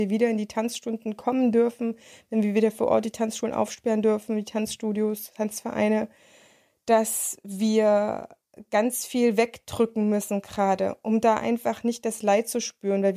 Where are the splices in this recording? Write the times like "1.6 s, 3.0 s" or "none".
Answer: none